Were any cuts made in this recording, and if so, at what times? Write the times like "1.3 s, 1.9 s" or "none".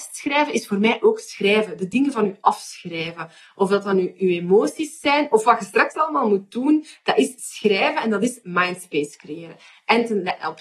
none

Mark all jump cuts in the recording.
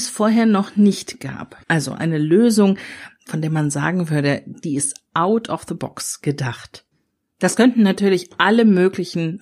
1.6 s

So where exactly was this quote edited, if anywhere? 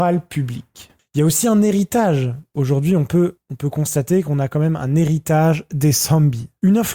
none

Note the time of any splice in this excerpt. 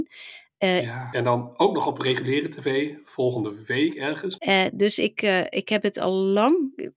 1.1 s, 4.4 s

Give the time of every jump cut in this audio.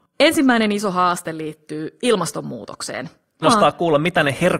3.4 s

